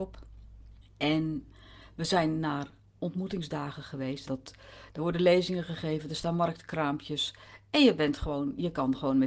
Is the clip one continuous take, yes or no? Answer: no